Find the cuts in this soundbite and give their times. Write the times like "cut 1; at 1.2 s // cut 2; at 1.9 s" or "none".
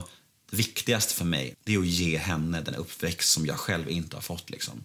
cut 1; at 1.5 s